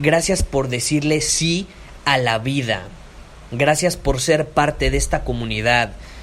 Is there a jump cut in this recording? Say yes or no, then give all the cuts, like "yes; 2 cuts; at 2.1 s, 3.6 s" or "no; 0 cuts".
no; 0 cuts